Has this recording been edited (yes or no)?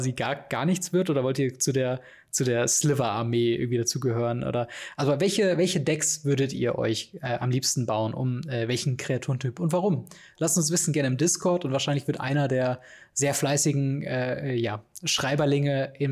no